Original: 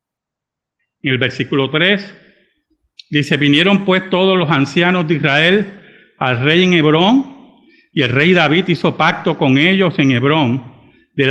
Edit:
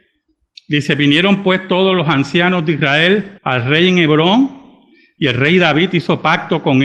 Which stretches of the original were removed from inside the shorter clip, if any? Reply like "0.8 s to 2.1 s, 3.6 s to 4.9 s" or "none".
5.8 s to 6.1 s